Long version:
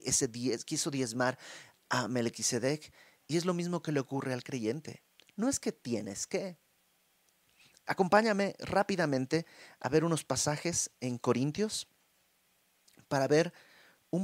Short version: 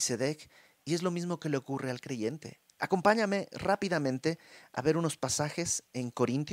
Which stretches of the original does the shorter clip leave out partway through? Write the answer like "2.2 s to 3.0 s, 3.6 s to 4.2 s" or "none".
5.1 s to 7.8 s